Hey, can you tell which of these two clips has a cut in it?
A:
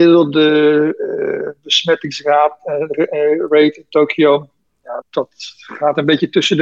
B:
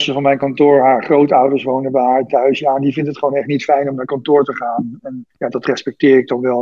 A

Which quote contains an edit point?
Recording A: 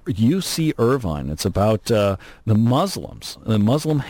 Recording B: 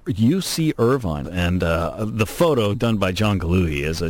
B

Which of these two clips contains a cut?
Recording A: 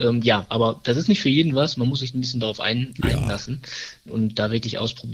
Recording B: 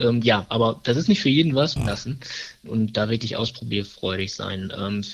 B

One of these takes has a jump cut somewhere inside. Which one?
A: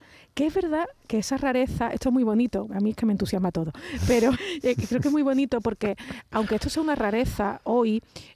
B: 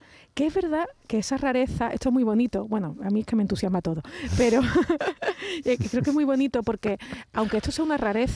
A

